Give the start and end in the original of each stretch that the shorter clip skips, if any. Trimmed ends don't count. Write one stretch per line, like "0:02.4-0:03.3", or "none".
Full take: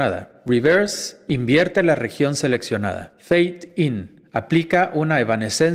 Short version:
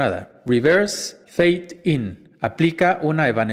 0:01.2-0:03.2